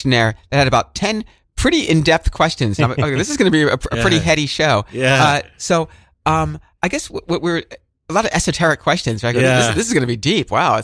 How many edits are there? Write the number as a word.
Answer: zero